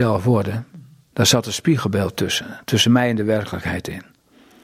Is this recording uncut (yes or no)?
yes